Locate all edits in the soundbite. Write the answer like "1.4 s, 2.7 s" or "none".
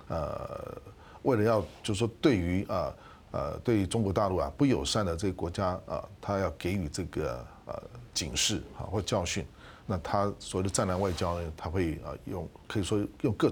none